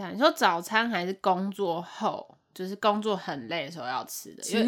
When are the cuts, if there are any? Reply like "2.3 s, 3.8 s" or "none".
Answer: none